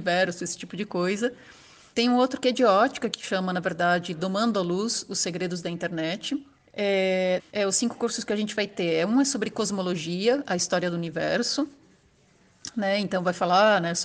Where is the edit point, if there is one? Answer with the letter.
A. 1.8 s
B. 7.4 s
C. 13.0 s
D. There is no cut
B